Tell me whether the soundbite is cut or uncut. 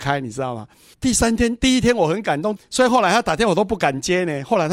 cut